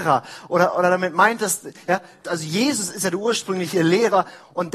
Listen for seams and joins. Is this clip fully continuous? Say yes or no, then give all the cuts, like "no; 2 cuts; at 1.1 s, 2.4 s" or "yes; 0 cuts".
no; 1 cut; at 2.2 s